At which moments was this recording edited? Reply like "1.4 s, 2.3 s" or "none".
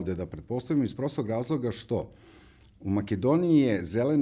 none